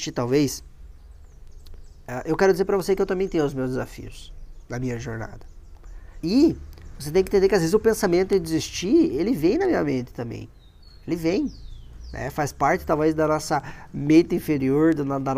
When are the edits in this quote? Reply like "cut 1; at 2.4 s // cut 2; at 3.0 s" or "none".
cut 1; at 6.2 s